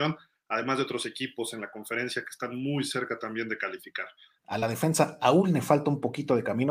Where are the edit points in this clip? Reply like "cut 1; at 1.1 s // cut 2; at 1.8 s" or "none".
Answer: cut 1; at 4.4 s